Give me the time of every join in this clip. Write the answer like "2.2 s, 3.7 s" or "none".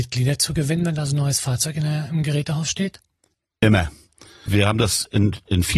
none